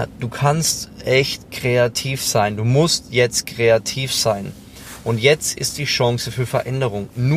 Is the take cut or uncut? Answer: uncut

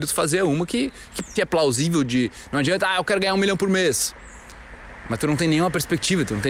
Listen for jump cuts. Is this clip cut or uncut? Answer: cut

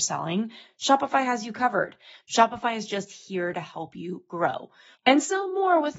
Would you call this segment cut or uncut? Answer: cut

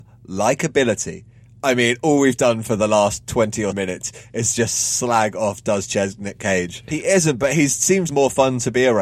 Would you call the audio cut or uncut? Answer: cut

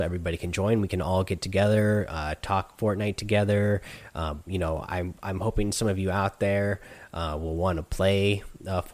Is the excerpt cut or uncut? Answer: uncut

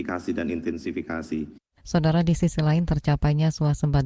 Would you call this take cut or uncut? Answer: cut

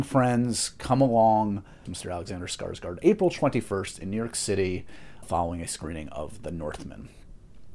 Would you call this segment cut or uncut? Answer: cut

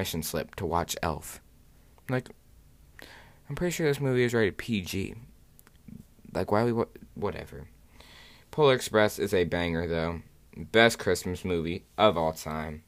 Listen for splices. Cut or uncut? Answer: uncut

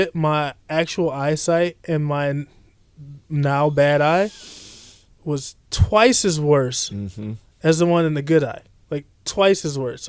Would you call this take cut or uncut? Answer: uncut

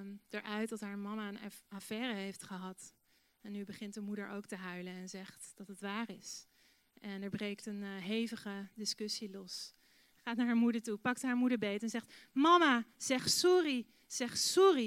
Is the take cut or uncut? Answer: cut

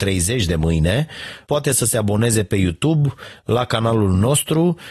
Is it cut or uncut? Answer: cut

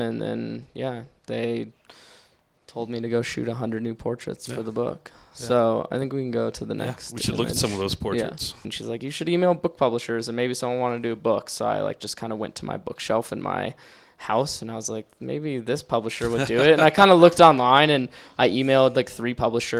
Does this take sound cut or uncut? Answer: cut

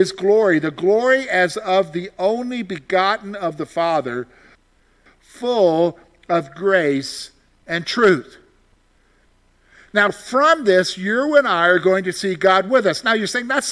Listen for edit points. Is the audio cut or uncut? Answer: uncut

